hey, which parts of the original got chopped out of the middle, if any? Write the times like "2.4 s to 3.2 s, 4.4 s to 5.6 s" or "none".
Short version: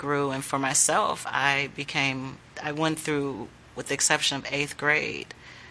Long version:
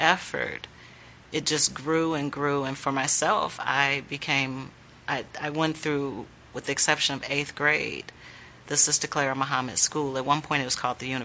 4.9 s to 5.3 s